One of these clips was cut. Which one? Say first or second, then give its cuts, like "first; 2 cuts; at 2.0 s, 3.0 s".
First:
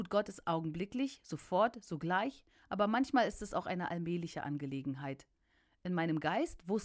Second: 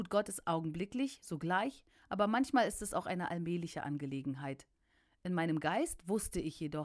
second; 1 cut; at 1.2 s